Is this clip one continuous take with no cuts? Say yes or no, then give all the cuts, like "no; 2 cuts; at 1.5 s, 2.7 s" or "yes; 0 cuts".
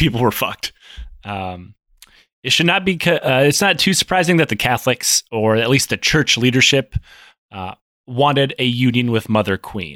yes; 0 cuts